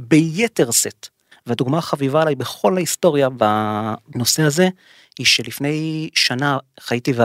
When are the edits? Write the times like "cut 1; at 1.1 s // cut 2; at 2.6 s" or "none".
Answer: cut 1; at 1.3 s